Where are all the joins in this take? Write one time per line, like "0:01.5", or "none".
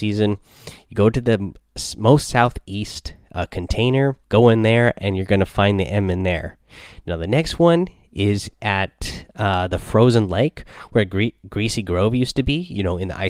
0:04.2